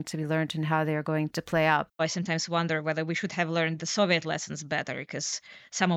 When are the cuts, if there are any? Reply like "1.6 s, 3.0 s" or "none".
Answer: 1.9 s